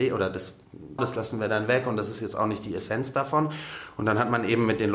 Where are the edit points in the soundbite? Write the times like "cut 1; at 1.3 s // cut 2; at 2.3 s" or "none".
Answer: cut 1; at 1.0 s